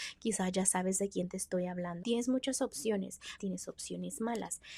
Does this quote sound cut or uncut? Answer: cut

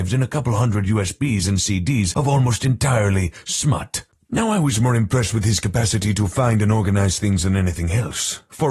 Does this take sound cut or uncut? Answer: uncut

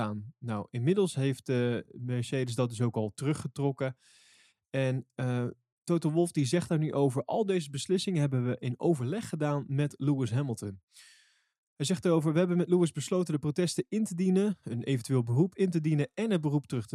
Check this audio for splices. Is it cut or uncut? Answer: uncut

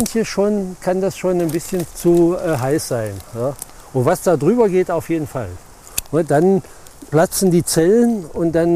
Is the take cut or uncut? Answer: cut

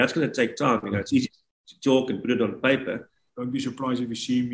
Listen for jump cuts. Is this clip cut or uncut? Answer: cut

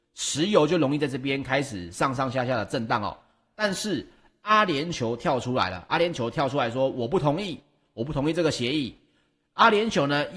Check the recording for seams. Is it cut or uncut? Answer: cut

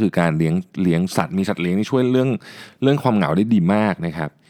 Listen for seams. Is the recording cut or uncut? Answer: uncut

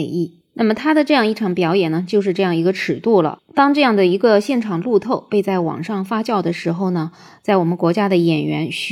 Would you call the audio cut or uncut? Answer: uncut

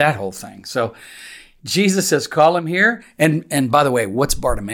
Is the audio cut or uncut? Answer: uncut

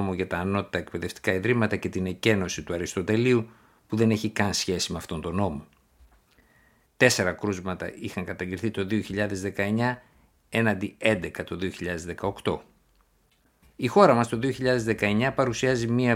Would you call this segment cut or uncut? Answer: cut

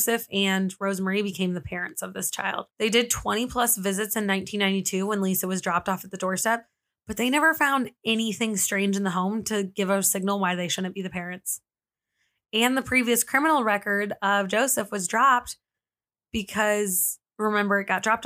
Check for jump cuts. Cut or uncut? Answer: cut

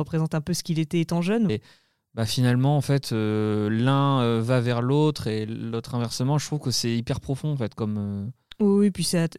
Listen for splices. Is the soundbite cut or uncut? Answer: cut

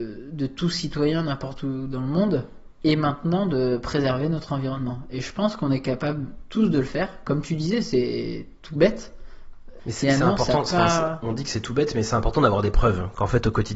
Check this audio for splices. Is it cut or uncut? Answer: cut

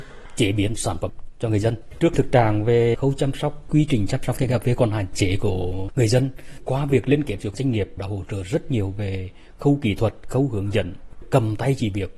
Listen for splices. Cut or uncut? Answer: uncut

